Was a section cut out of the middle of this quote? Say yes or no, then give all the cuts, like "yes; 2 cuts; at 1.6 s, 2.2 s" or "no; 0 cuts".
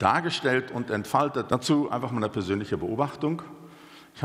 yes; 1 cut; at 1.5 s